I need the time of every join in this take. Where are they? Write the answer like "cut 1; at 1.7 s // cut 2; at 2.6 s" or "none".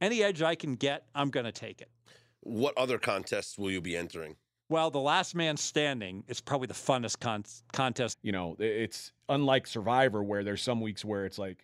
cut 1; at 8.1 s